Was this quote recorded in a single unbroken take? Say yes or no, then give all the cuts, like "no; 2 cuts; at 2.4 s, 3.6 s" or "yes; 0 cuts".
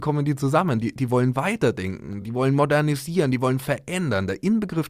yes; 0 cuts